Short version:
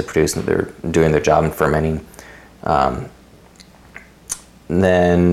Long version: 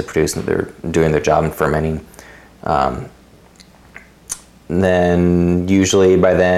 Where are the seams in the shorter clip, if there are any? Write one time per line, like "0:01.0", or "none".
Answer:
none

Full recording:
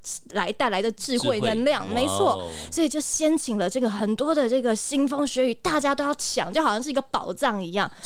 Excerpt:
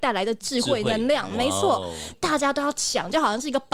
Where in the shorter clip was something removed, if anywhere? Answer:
0:02.1

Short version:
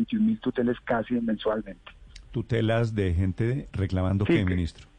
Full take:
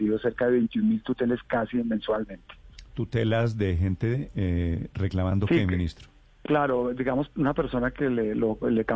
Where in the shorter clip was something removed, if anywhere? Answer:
0:03.7

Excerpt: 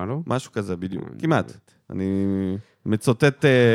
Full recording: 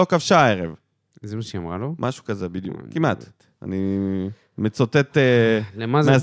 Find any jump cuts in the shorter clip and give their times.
none

